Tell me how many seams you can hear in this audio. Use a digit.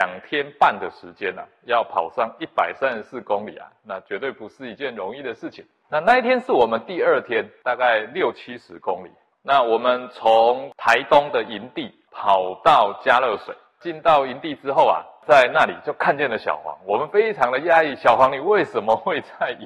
1